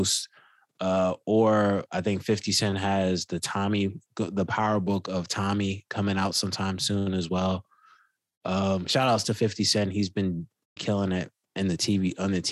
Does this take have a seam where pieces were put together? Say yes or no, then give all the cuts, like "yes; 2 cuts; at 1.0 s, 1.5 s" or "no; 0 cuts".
yes; 1 cut; at 10.8 s